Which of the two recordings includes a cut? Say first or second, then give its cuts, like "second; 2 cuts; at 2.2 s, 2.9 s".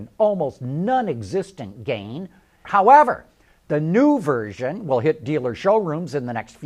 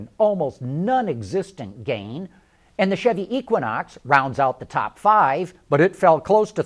first; 1 cut; at 2.6 s